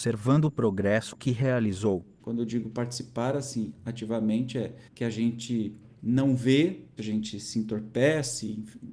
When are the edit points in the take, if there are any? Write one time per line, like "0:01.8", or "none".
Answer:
0:02.2
0:04.9
0:07.0